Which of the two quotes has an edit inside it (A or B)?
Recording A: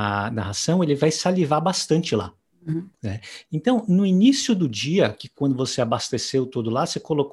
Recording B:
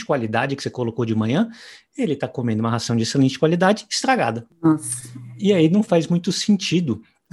A